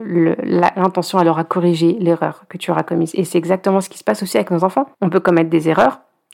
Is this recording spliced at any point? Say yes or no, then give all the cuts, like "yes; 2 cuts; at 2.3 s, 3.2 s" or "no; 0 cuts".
yes; 1 cut; at 4.9 s